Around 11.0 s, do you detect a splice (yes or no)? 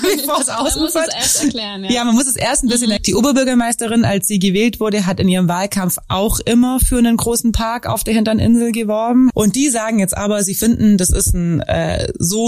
no